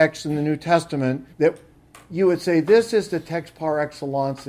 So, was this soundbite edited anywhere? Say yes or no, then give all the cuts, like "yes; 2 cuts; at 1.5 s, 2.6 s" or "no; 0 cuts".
yes; 1 cut; at 1.3 s